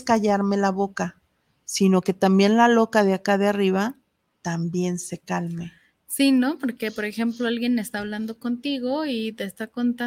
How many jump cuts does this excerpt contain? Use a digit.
0